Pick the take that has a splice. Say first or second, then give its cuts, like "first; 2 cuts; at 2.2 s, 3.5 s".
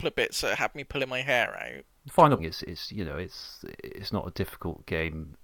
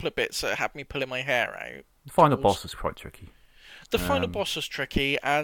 first; 1 cut; at 2.4 s